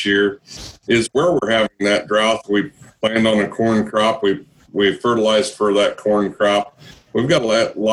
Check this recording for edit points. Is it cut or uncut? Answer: uncut